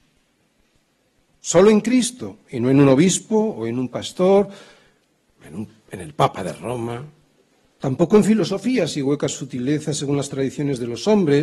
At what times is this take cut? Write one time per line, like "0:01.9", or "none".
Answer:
none